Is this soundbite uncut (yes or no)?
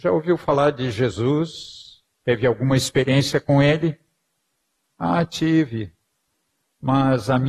yes